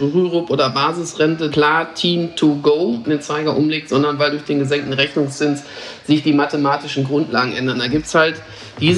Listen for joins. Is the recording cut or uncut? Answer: cut